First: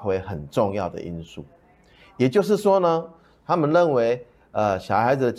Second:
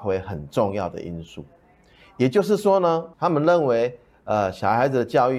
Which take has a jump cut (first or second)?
second